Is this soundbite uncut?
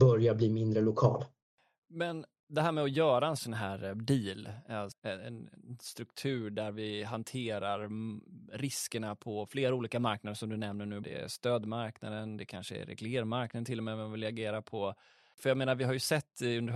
no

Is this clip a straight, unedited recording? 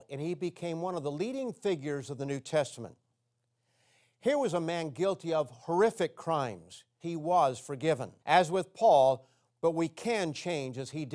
no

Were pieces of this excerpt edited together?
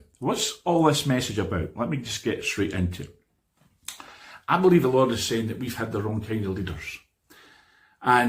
no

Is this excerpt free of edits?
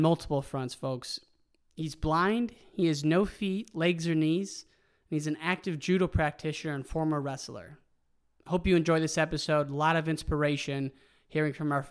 yes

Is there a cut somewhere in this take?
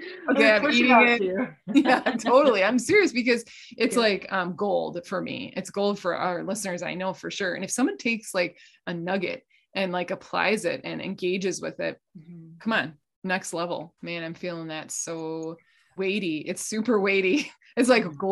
yes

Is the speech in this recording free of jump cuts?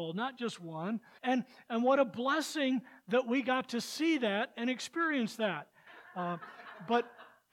no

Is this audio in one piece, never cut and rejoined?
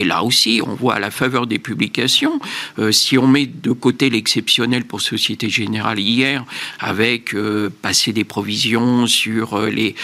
yes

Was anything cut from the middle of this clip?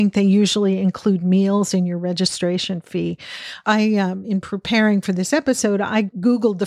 no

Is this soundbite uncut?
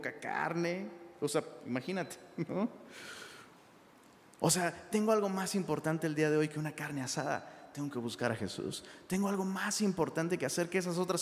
yes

